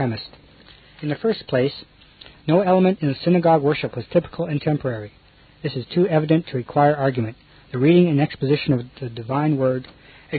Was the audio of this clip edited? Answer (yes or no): no